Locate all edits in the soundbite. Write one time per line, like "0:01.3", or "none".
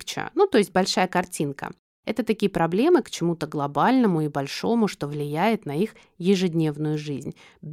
0:03.0